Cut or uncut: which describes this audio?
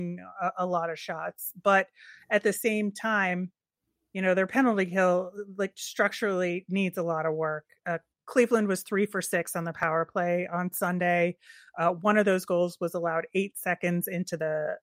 uncut